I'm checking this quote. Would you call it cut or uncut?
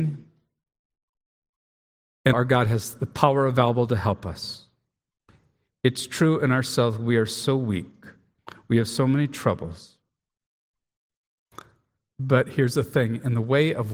cut